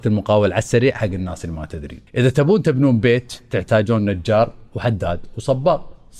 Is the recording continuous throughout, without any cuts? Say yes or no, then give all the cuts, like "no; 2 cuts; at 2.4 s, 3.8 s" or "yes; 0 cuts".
no; 1 cut; at 2.1 s